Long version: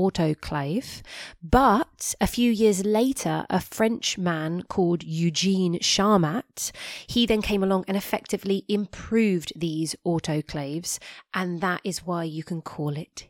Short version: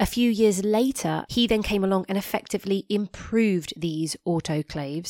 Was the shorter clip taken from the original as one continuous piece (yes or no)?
no